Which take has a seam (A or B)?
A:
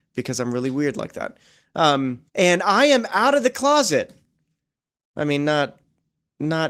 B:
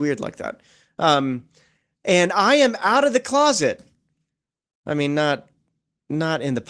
A